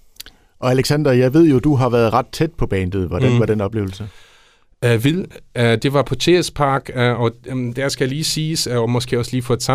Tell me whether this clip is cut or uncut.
uncut